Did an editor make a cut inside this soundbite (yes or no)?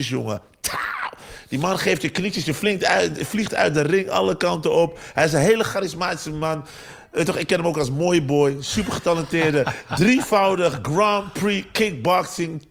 no